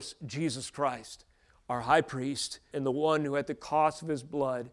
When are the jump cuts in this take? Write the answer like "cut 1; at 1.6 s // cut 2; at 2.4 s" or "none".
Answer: cut 1; at 2.7 s